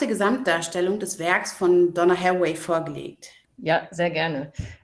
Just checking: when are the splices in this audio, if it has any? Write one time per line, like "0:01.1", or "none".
0:03.4

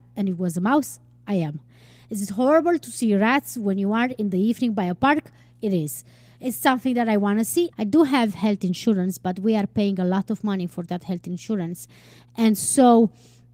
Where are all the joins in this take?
0:07.7

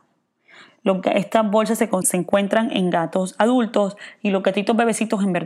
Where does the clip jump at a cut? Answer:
0:02.0

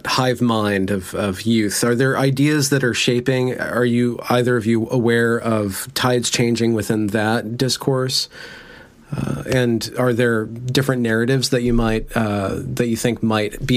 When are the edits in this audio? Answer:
none

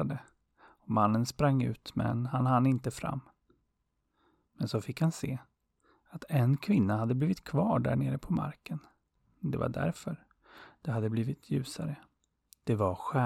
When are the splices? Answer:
0:09.2

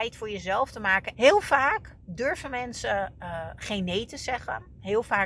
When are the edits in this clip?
0:01.1

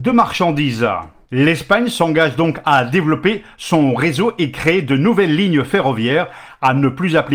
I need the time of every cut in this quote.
none

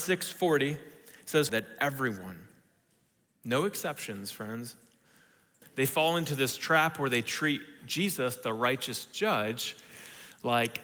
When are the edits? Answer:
0:01.5
0:05.6

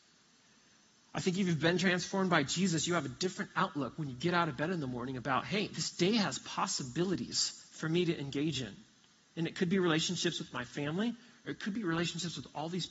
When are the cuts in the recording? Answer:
none

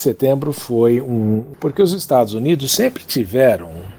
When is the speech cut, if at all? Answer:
0:01.5

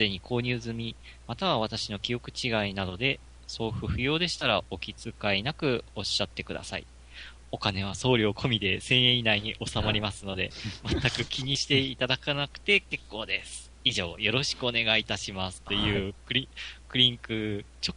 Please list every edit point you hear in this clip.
none

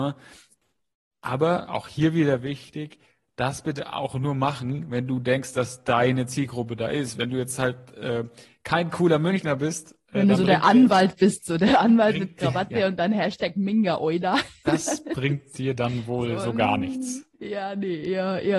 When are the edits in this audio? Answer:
0:17.3

